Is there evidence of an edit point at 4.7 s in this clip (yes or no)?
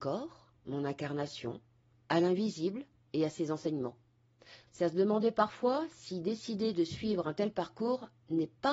yes